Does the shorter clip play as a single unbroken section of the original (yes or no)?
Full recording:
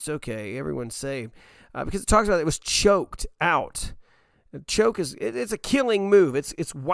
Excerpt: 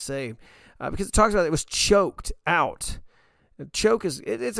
yes